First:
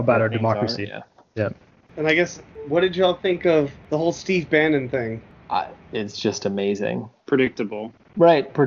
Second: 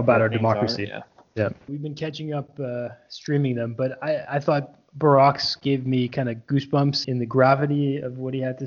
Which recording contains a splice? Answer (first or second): second